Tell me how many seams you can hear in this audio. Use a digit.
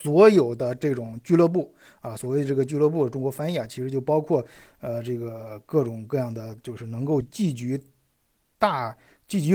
1